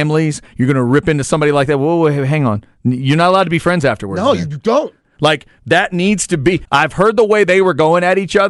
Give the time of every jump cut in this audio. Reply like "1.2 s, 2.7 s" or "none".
5.0 s, 6.7 s